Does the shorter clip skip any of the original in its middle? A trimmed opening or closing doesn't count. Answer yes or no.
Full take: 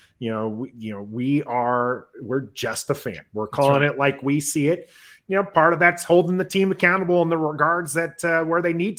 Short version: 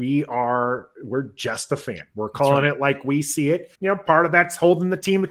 yes